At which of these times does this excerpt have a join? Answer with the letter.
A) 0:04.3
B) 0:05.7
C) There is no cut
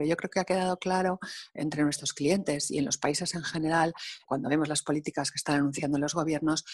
A